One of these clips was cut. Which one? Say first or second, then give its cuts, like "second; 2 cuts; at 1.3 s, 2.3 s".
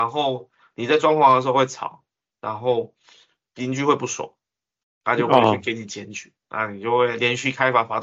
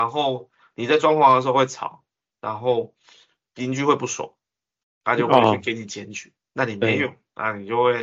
first; 1 cut; at 6.4 s